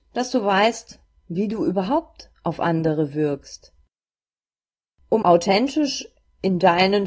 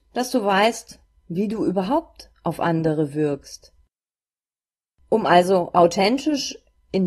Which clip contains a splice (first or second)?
first